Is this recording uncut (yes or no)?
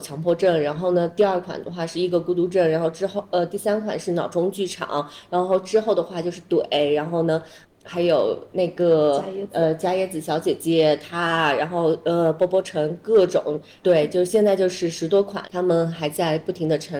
no